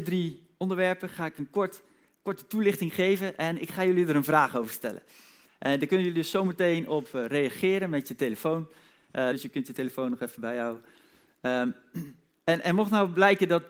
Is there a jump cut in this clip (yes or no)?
yes